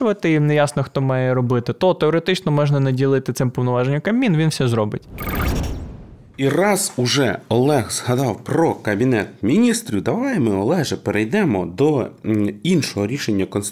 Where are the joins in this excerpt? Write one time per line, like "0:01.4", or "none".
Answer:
none